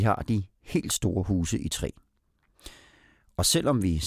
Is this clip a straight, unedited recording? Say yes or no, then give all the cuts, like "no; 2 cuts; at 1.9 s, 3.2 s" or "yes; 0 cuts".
yes; 0 cuts